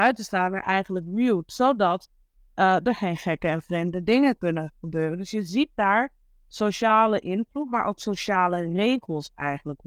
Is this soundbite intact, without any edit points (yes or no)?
yes